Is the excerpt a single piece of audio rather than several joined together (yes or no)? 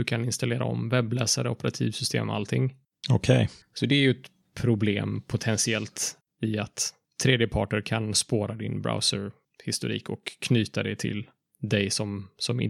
no